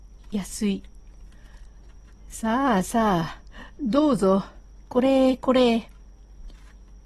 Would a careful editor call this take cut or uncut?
uncut